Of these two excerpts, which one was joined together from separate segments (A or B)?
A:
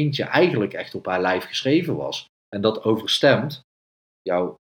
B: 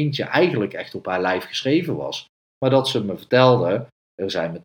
A